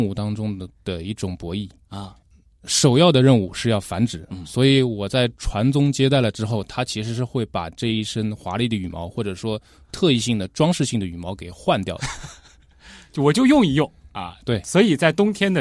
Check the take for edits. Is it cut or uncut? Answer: uncut